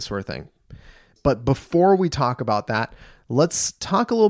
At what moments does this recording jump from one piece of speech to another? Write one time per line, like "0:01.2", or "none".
0:01.2